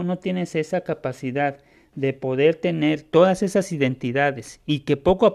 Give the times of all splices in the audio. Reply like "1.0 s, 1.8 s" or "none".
none

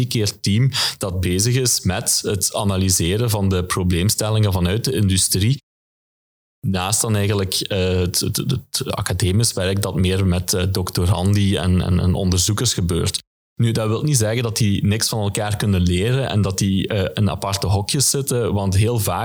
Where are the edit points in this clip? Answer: none

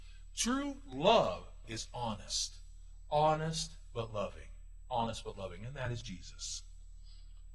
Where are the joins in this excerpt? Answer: 1.6 s

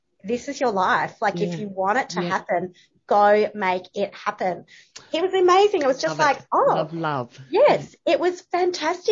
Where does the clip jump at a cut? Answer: none

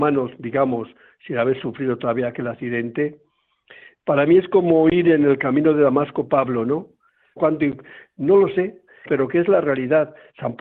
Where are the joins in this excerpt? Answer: 7.4 s, 9.1 s

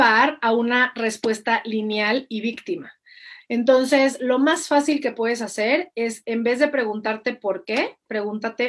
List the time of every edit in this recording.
3.4 s

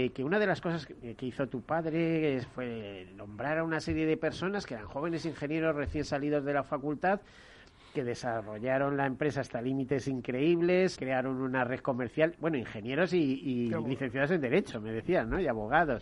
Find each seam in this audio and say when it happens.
10.9 s

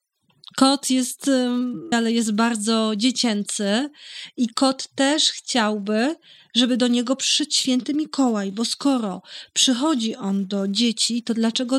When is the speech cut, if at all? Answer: 1.9 s

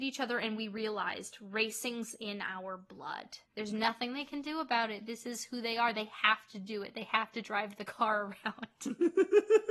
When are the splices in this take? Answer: 3.4 s

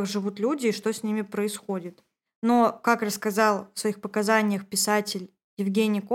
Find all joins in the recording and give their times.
none

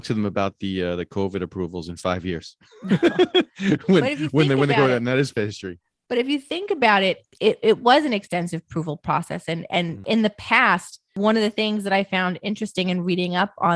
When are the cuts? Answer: none

